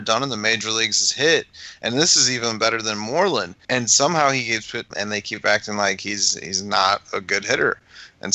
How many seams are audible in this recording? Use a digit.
1